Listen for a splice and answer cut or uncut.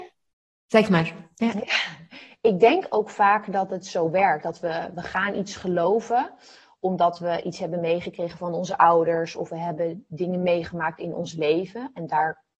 uncut